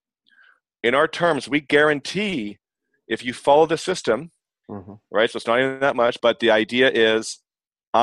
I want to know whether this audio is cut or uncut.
cut